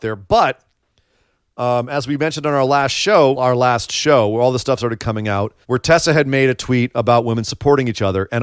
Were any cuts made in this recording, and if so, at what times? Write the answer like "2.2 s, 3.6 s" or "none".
3.3 s, 5.6 s